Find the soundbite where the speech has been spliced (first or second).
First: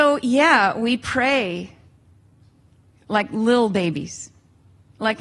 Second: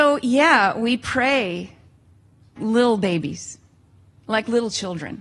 second